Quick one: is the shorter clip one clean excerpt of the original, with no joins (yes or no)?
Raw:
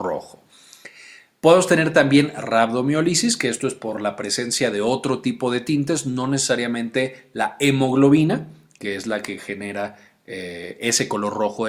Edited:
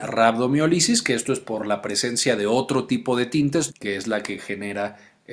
no